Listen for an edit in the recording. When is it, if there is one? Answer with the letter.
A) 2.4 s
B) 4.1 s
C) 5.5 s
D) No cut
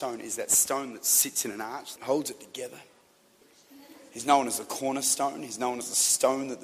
D